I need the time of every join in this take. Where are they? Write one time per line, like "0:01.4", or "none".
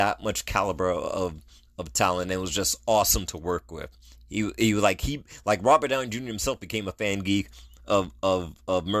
none